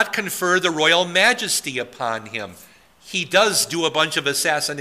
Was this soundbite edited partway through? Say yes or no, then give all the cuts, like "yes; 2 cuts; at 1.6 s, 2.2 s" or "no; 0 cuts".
no; 0 cuts